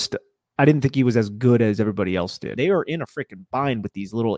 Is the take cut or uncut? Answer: cut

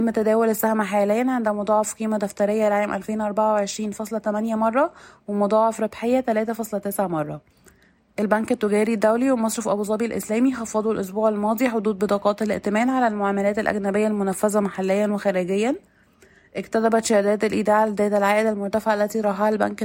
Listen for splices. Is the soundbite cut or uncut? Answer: uncut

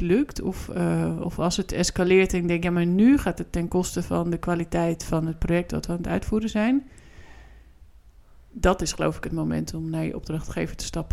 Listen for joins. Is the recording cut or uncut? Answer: uncut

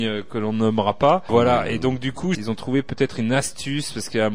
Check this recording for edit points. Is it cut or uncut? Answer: cut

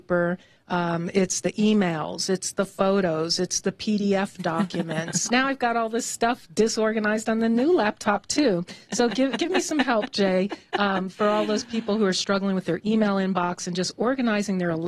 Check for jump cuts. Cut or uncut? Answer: cut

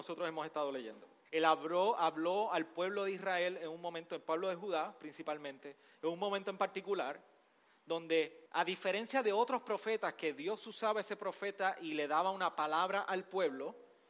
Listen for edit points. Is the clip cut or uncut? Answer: cut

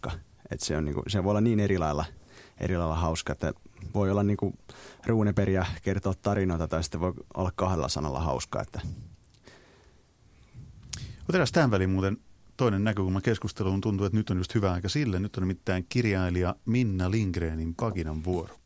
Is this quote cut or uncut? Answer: uncut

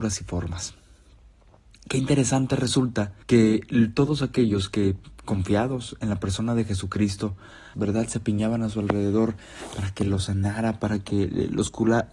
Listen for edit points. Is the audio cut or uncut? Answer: cut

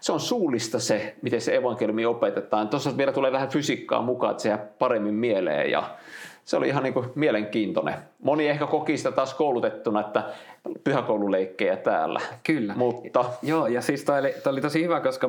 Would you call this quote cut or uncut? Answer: uncut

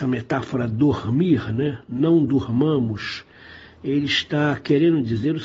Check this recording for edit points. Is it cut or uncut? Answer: uncut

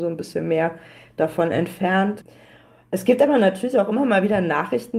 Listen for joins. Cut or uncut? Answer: uncut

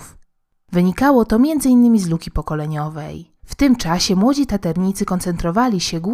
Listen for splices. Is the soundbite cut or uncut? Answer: cut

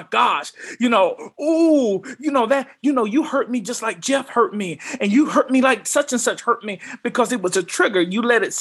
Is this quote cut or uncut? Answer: uncut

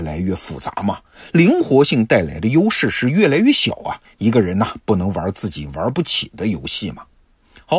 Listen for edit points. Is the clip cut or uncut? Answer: cut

